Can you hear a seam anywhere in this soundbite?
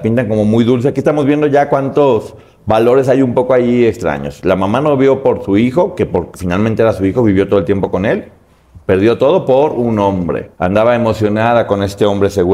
yes; 1 cut; at 10.5 s

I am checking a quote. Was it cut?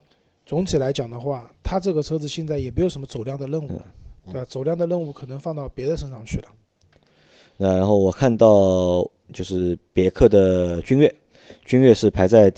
no; 0 cuts

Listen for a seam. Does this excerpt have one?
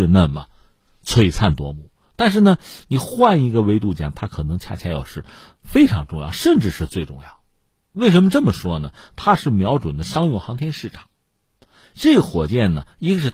no; 0 cuts

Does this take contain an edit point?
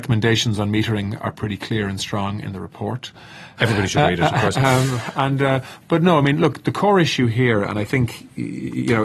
yes; 1 cut; at 3.6 s

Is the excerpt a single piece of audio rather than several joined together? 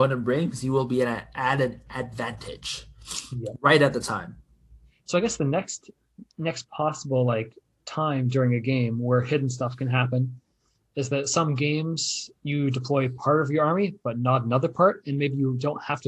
yes; 0 cuts

